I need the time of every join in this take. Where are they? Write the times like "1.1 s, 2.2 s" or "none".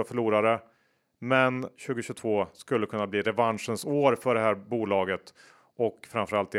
1.8 s

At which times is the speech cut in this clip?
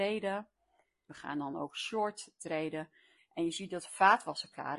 1.1 s, 3.2 s

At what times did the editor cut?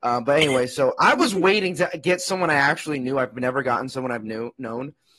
none

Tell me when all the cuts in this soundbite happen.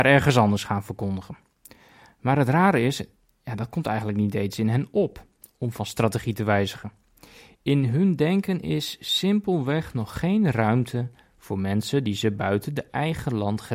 none

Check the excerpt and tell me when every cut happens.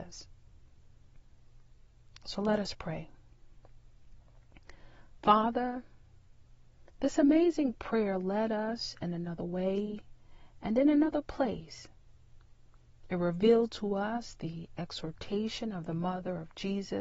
none

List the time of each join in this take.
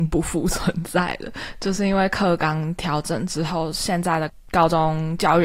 none

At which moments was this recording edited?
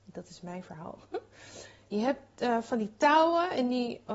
none

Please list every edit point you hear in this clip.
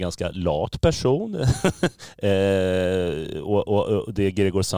none

